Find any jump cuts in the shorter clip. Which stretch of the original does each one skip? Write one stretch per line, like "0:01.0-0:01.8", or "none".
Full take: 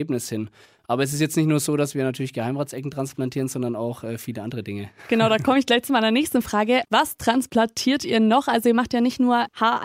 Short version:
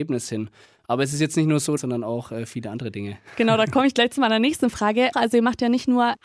0:01.8-0:03.5
0:06.8-0:08.4